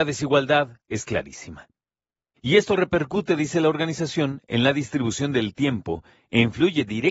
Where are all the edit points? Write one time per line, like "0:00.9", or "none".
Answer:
0:02.4

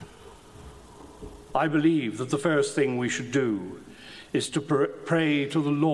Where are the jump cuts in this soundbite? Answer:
0:01.5

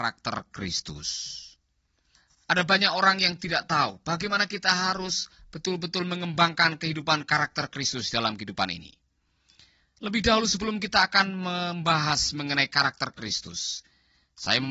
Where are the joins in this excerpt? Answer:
none

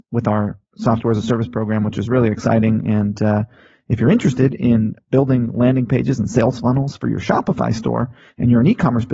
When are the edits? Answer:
none

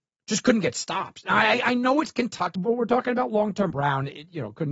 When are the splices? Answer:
0:02.6
0:03.7

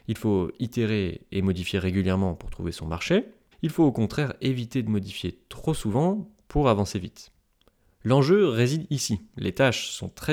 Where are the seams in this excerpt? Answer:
0:03.5

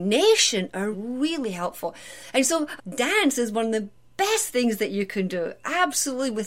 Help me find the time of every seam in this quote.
0:00.9
0:02.8

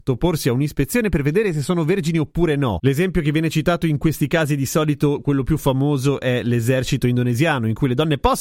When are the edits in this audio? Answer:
none

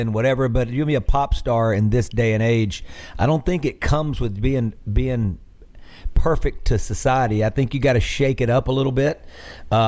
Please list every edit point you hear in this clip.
none

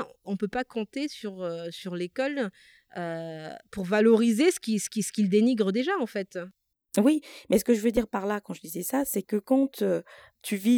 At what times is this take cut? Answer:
none

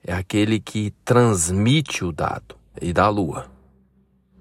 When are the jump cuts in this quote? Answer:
0:02.7

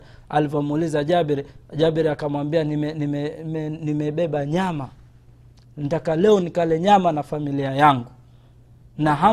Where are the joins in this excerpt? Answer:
none

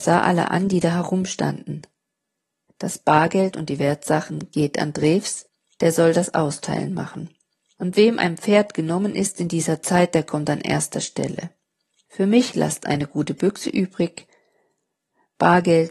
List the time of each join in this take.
0:02.7

